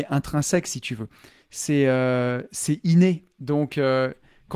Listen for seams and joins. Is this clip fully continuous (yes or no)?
yes